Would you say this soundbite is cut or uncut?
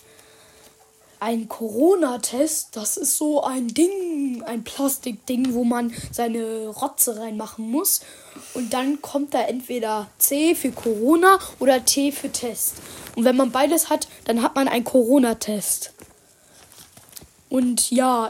uncut